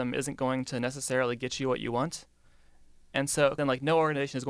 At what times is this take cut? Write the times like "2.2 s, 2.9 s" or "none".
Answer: 3.6 s